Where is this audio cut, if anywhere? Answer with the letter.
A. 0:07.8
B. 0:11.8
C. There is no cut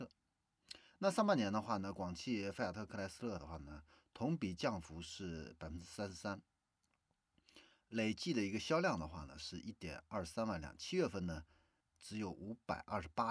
B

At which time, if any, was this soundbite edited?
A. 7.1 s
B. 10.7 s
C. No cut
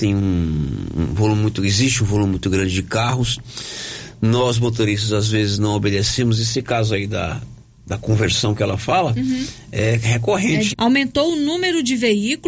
B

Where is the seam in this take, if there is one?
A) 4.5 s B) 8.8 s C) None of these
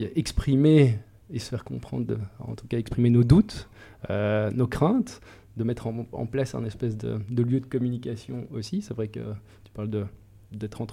C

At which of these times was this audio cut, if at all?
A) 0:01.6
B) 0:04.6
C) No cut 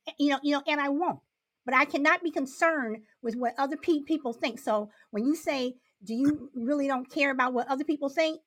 C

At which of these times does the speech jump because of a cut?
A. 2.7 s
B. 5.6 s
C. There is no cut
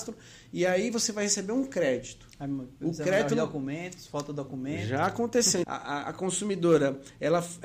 B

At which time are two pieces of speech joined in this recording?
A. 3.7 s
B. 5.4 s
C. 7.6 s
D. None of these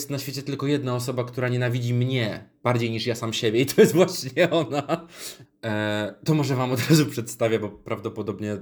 B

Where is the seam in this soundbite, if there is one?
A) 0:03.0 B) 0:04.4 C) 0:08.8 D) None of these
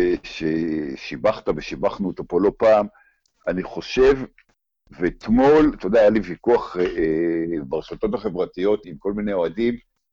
C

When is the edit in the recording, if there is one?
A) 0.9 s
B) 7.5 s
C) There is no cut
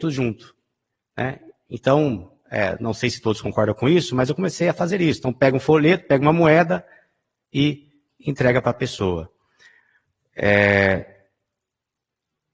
C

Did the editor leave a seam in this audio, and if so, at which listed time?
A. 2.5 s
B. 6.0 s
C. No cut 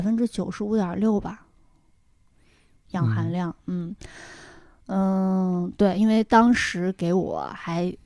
C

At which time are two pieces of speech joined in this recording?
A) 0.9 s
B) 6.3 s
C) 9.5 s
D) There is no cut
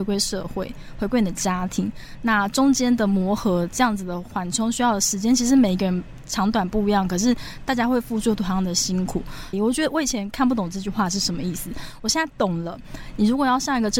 C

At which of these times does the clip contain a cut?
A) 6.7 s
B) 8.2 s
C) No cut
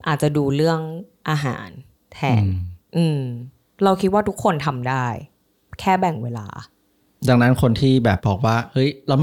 B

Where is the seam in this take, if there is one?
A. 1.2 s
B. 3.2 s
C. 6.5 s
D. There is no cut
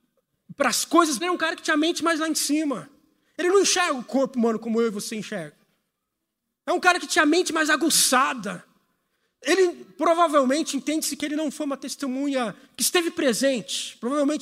A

